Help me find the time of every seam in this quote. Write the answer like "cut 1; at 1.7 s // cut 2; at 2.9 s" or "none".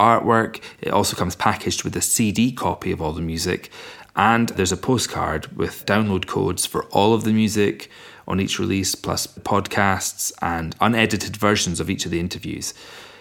none

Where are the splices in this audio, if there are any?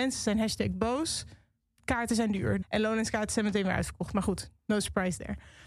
cut 1; at 2.6 s

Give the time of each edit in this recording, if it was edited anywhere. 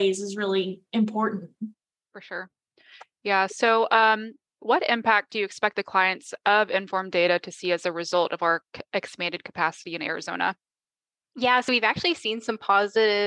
none

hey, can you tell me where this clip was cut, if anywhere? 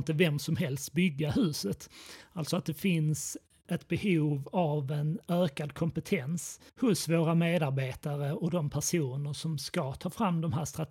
cut 1; at 3.6 s // cut 2; at 6.7 s

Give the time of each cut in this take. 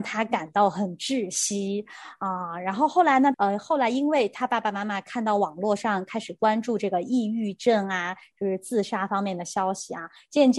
cut 1; at 3.3 s

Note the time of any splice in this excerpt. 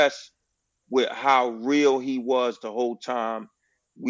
none

